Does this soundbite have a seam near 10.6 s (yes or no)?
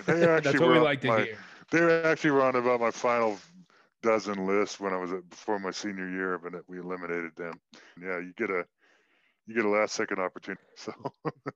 yes